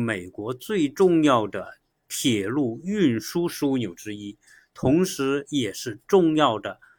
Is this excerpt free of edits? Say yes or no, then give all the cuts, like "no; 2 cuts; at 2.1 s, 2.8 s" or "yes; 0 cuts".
yes; 0 cuts